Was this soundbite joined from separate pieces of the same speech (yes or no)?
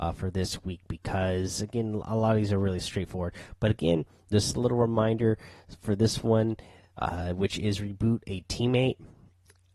no